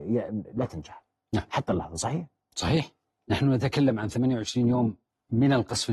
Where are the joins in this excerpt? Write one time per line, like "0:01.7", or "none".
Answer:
none